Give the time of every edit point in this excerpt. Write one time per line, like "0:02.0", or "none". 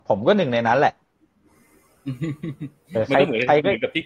0:02.9